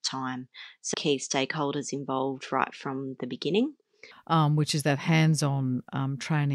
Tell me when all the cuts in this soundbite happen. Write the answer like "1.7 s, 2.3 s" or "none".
0.9 s, 4.1 s